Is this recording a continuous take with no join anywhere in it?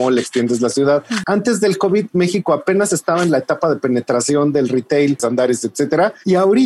no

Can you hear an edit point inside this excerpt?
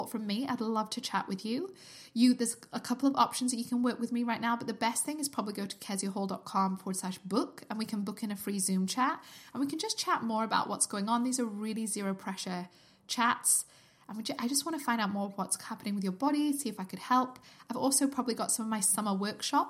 no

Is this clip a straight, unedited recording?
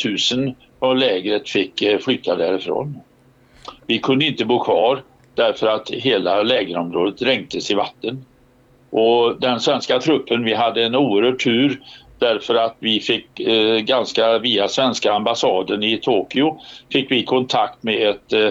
yes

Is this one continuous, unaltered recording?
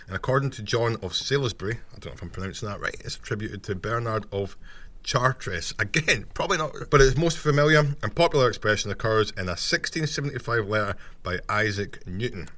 no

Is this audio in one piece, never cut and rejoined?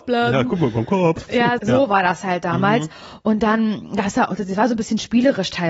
no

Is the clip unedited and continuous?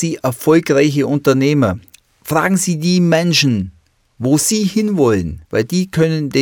no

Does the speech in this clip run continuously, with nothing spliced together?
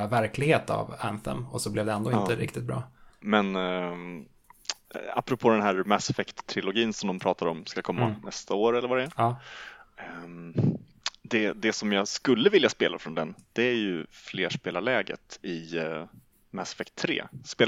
no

